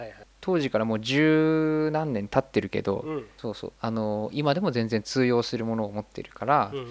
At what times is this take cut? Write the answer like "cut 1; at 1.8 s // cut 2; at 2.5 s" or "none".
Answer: cut 1; at 3.4 s